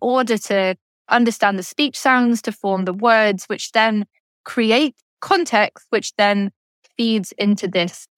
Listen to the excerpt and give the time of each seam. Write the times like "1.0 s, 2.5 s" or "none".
none